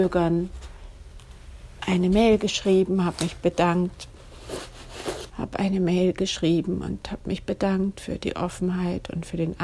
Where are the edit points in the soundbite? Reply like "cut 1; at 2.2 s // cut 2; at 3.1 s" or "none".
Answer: cut 1; at 5.3 s